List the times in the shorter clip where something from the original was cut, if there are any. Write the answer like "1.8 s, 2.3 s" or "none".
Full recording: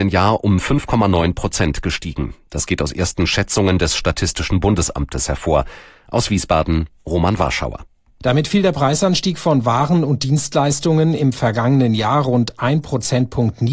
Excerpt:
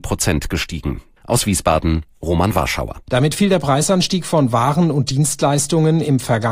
1.2 s, 3.1 s